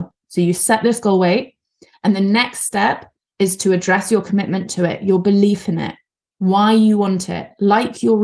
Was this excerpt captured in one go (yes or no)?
yes